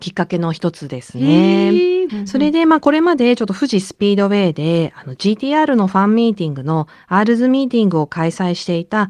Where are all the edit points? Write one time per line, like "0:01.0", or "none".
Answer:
0:02.1